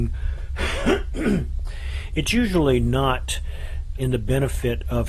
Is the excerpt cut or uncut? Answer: cut